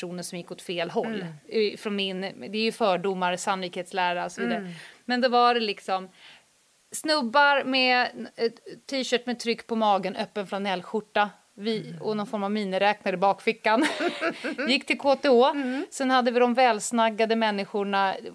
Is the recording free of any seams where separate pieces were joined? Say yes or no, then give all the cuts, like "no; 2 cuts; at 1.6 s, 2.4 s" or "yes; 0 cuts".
yes; 0 cuts